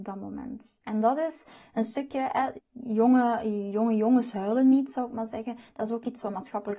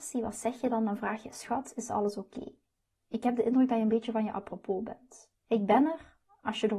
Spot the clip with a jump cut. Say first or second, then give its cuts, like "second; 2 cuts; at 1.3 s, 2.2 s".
first; 1 cut; at 2.6 s